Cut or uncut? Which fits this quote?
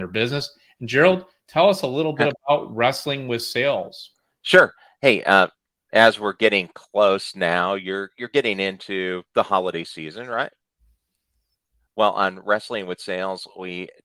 uncut